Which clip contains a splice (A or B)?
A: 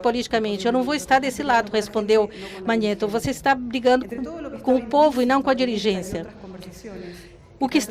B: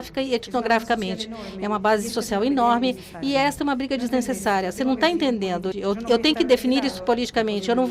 B